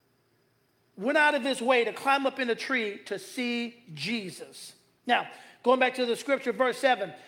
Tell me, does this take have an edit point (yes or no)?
no